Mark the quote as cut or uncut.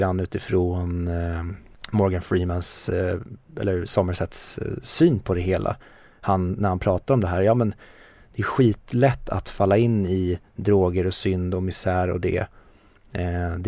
uncut